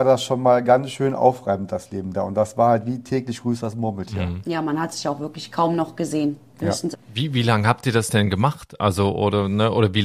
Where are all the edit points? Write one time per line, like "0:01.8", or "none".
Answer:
0:06.9